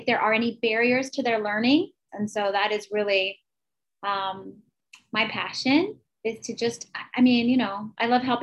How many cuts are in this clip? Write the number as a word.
one